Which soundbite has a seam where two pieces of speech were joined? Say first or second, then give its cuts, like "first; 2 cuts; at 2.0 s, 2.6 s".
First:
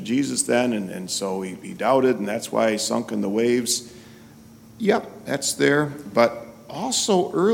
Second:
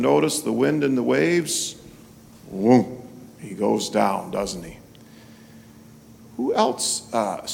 second; 1 cut; at 6.2 s